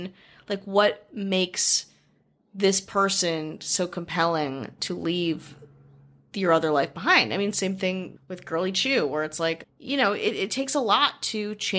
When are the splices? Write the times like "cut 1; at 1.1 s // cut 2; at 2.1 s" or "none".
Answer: cut 1; at 8.2 s // cut 2; at 9.6 s